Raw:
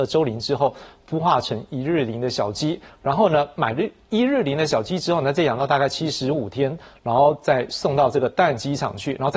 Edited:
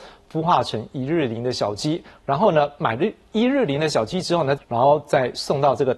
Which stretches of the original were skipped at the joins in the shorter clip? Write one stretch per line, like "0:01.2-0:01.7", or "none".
0:05.4-0:06.9